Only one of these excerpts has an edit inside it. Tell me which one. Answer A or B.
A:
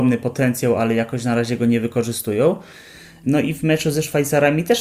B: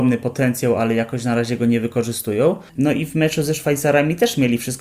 B